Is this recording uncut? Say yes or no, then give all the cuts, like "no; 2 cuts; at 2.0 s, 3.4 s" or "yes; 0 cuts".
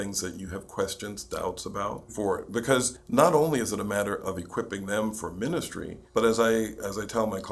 no; 2 cuts; at 2.1 s, 6.1 s